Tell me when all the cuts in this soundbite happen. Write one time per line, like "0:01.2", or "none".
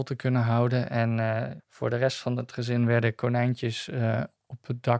0:01.6